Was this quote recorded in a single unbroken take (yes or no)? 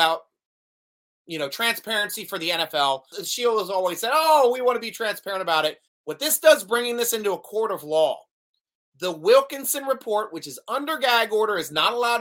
no